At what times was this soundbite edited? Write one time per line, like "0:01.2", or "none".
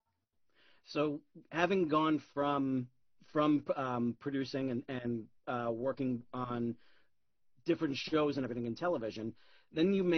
none